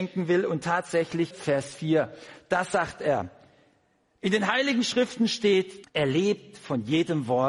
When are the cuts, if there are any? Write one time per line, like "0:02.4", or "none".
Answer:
0:01.3
0:05.8

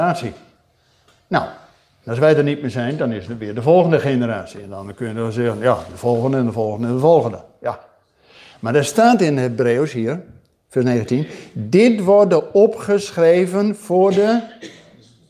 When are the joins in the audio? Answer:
none

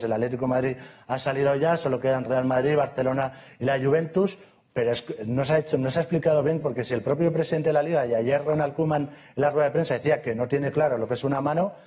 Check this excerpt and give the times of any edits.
0:04.7
0:06.6

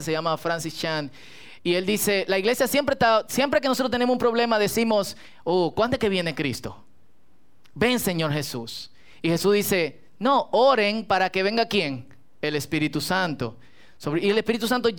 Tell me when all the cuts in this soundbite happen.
none

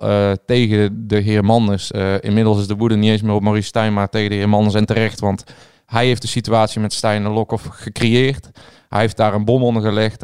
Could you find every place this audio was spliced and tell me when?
none

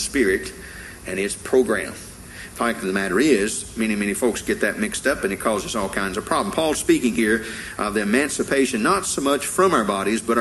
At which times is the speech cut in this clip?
none

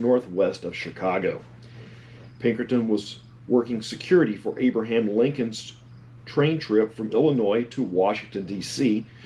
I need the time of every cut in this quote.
0:02.3

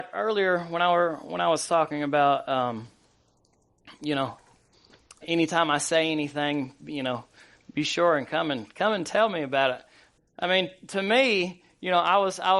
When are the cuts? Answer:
0:05.2
0:10.2

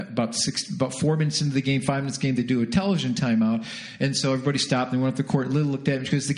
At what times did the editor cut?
none

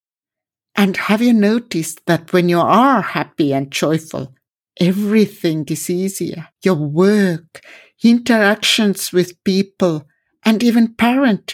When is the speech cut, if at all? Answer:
0:06.5

